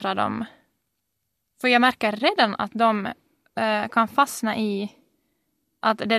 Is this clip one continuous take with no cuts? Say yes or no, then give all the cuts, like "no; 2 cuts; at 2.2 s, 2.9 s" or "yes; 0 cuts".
yes; 0 cuts